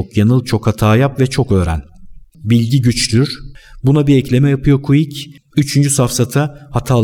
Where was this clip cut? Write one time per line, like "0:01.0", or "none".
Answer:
0:02.3
0:05.4